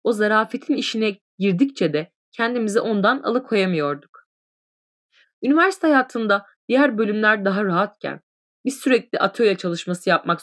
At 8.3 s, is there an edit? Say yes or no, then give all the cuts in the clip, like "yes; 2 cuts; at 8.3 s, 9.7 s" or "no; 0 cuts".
no; 1 cut; at 5.2 s